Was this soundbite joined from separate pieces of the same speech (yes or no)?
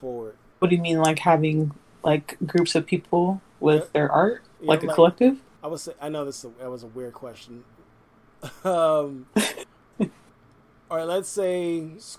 no